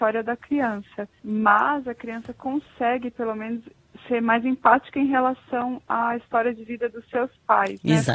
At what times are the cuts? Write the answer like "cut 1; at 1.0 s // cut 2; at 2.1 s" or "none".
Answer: none